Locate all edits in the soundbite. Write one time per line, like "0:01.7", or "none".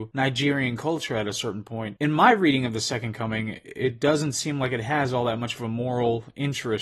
0:02.0